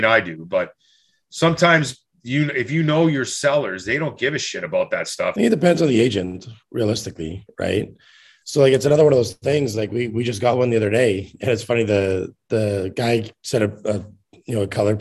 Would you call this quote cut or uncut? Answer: cut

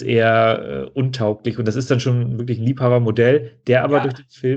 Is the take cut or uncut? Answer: uncut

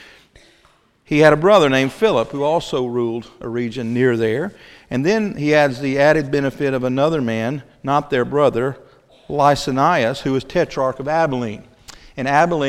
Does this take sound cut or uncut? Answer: uncut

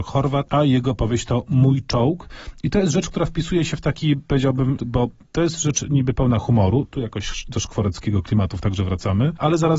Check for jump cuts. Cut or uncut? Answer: cut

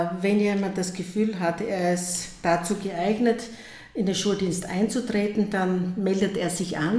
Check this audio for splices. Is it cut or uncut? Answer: uncut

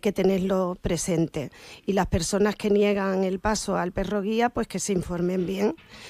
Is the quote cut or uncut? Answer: uncut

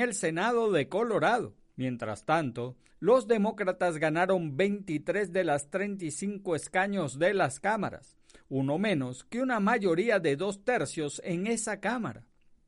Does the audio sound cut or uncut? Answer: cut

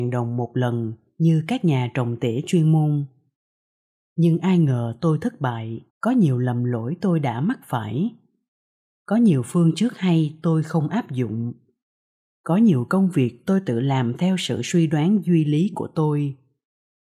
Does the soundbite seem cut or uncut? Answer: cut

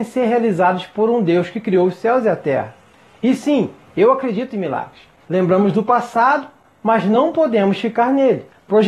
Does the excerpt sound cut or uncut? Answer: cut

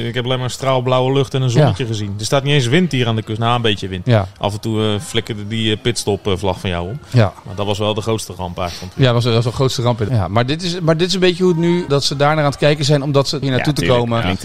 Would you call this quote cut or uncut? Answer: cut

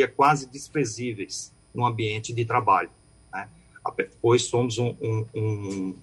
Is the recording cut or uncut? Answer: uncut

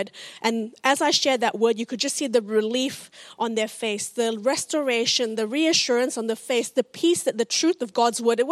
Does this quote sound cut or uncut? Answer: uncut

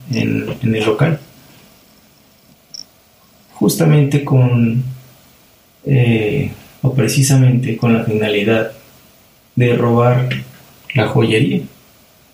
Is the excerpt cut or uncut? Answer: uncut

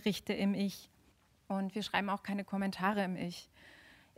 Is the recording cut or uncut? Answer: uncut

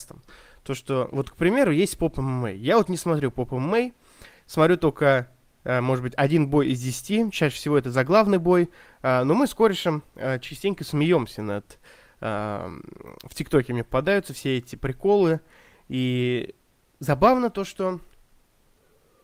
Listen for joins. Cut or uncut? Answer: uncut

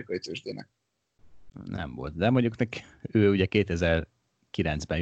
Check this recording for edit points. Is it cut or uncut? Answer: uncut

